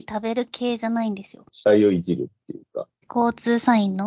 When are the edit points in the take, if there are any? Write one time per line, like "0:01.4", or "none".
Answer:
0:01.5
0:03.0